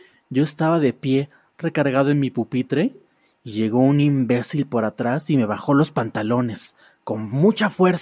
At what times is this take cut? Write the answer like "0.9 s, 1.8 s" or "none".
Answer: none

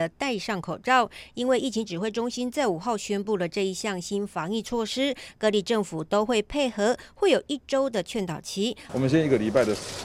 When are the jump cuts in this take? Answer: 8.9 s

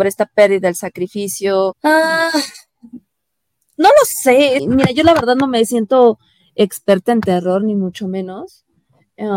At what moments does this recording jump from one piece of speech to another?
1.7 s, 4.6 s

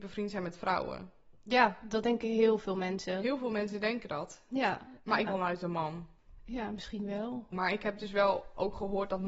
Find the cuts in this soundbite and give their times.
5.3 s, 7.5 s

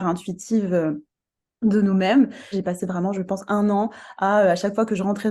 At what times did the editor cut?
2.5 s

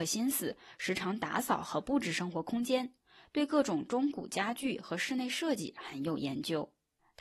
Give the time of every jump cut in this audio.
none

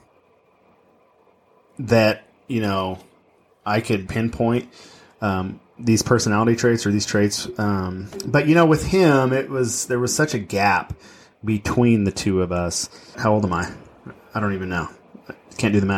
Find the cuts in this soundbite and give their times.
4.1 s, 13.1 s

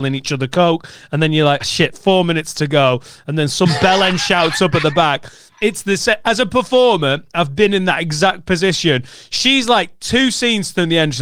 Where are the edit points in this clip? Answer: 1.6 s

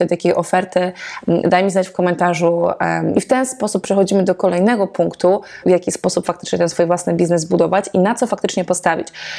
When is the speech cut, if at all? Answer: 3.1 s, 5.6 s

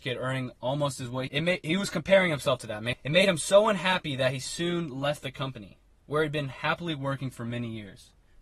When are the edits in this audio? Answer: 1.3 s, 2.9 s

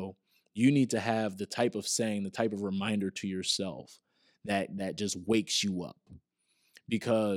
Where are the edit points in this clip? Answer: none

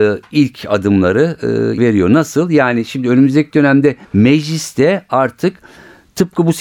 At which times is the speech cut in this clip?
1.8 s, 4.0 s

